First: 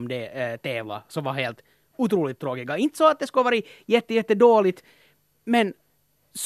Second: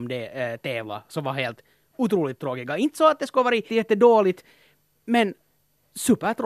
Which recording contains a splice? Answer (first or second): second